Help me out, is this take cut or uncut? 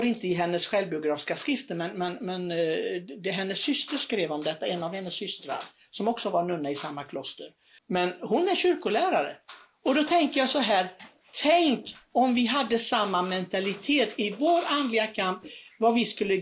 cut